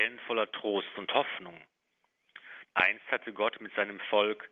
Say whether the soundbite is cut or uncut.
cut